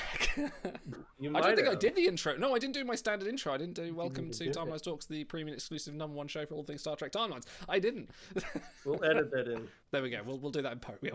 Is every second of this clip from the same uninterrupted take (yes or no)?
yes